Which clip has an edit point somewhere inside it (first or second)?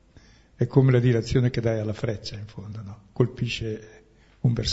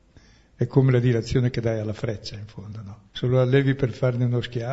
second